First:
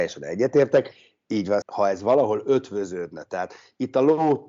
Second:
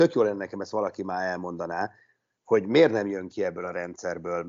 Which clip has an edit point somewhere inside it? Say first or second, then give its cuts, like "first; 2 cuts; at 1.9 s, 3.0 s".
first; 1 cut; at 1.6 s